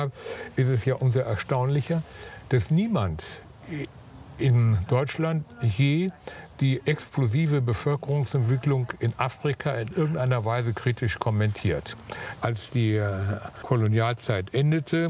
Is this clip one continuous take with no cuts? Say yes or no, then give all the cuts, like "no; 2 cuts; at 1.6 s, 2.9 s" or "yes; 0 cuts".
no; 2 cuts; at 12.4 s, 13.6 s